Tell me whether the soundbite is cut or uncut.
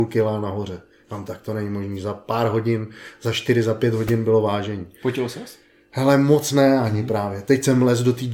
uncut